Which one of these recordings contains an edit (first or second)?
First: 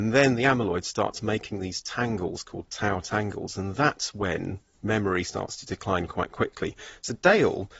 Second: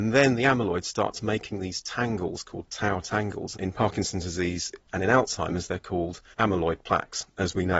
second